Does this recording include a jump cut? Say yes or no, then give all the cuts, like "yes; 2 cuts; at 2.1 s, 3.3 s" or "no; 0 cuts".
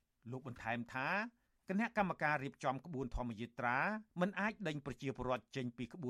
yes; 1 cut; at 4.1 s